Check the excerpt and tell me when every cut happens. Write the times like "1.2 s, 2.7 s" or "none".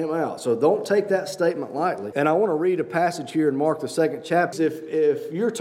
2.1 s, 4.5 s